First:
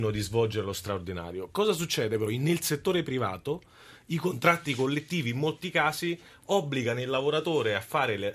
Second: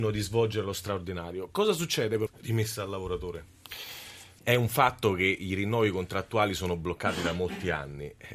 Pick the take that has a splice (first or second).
second